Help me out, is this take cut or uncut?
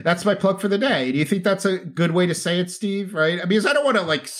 uncut